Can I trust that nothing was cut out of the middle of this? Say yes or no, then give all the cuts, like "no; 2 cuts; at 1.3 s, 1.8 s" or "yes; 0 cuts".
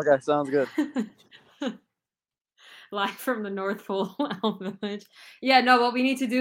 yes; 0 cuts